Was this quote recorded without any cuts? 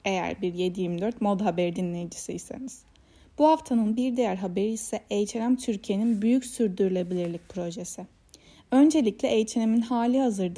yes; 0 cuts

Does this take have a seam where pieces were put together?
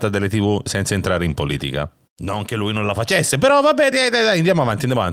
yes; 1 cut; at 3.9 s

